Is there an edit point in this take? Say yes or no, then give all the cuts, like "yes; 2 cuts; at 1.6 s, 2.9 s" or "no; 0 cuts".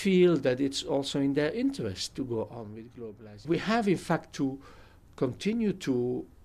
yes; 1 cut; at 3.4 s